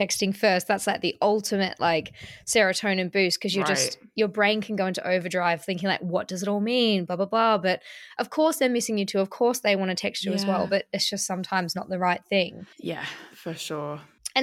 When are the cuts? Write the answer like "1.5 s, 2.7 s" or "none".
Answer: 12.7 s